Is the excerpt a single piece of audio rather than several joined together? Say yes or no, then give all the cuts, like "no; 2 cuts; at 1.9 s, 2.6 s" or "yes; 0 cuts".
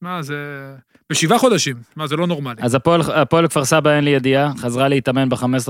yes; 0 cuts